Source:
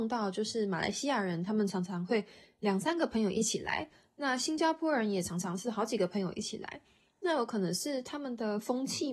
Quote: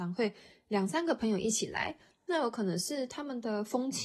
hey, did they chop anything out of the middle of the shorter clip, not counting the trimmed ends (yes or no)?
yes